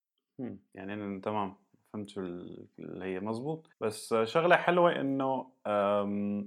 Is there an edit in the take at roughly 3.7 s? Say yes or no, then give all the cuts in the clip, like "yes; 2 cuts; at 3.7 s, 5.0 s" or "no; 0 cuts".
yes; 1 cut; at 3.7 s